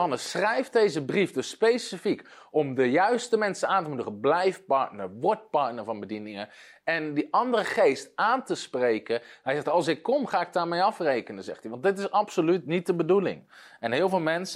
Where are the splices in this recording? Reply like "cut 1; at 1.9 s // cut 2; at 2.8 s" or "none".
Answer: none